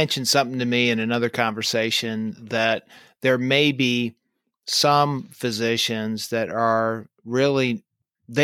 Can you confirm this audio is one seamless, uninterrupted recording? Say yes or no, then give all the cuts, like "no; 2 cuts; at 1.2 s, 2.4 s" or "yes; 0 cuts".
yes; 0 cuts